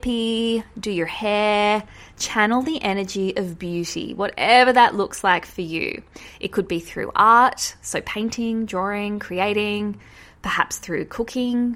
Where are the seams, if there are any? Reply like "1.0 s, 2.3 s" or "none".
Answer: none